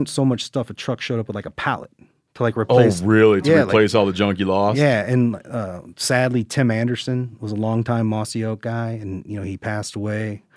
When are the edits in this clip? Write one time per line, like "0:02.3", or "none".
none